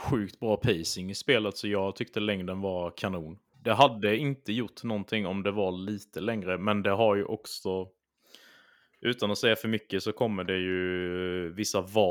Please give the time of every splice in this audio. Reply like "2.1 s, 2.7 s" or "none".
3.5 s